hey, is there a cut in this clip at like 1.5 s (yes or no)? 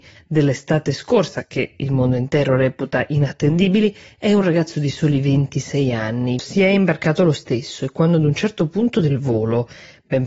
no